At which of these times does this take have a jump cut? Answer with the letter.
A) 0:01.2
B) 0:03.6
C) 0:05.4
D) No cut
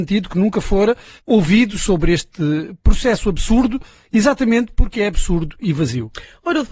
A